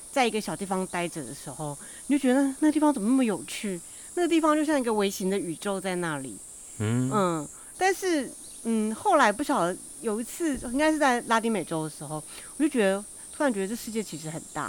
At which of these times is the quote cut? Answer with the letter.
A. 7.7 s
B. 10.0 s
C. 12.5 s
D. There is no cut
A